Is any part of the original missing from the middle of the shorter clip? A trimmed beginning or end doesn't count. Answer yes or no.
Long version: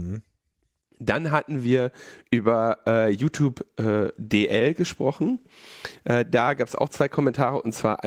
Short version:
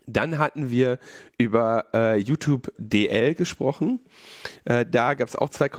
yes